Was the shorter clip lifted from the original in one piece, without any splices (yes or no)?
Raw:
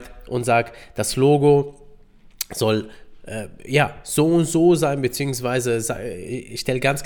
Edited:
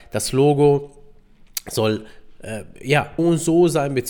no